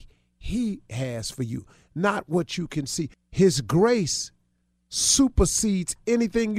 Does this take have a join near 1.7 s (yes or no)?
no